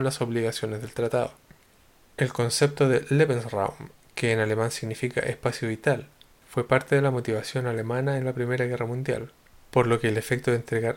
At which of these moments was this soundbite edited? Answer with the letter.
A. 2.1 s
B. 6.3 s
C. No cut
A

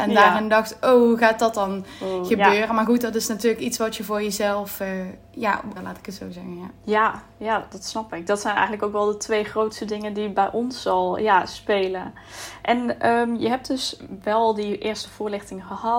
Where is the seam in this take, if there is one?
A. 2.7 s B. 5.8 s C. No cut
B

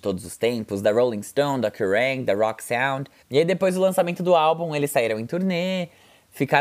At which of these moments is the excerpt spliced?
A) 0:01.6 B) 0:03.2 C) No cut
B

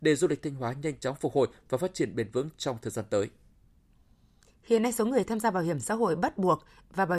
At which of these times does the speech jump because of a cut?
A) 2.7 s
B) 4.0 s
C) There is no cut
C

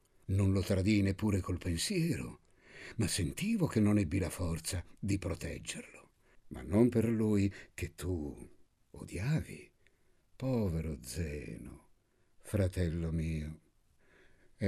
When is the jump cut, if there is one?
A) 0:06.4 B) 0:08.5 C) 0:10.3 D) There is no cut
A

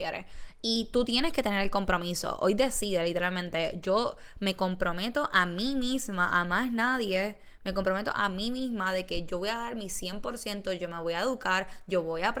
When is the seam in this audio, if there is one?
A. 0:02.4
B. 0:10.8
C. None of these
C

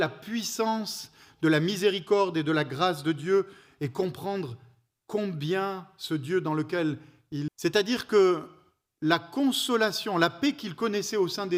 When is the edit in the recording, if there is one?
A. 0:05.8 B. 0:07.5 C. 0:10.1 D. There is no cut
B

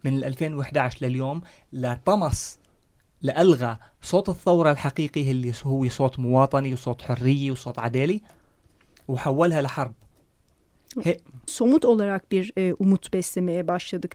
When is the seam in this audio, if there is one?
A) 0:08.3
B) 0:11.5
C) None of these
B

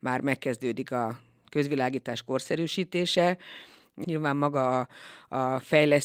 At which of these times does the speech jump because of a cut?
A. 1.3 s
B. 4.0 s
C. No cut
B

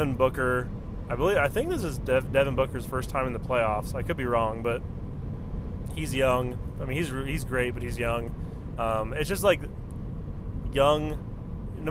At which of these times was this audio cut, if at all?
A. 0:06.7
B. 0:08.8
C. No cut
B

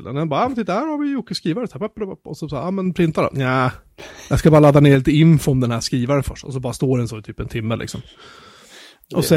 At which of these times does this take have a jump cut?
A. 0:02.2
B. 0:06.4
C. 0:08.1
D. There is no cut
D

